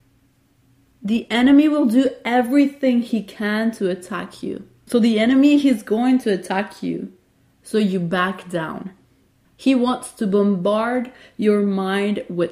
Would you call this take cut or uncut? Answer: cut